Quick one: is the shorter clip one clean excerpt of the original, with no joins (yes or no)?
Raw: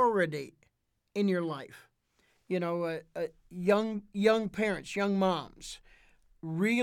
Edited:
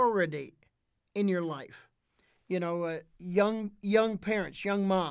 no